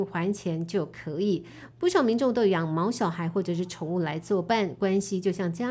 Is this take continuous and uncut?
no; 1 cut; at 1.7 s

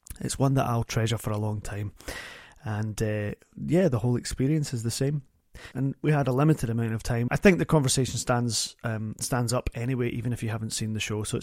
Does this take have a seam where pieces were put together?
yes; 2 cuts; at 5.7 s, 7.3 s

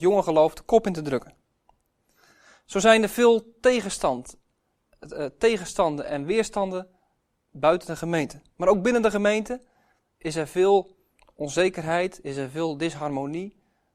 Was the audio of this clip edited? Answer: no; 0 cuts

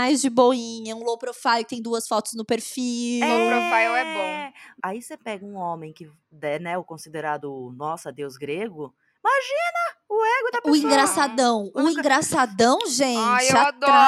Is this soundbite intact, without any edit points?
no; 1 cut; at 4.8 s

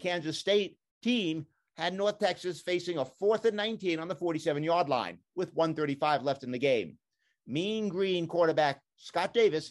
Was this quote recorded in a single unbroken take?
yes; 0 cuts

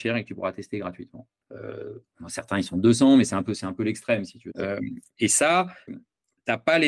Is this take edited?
yes; 3 cuts; at 1.4 s, 4.5 s, 5.9 s

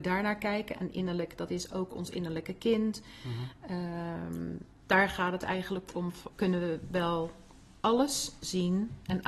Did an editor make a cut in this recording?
yes; 1 cut; at 6.3 s

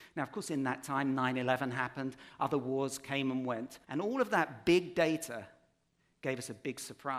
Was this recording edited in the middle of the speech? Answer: yes; 1 cut; at 3.8 s

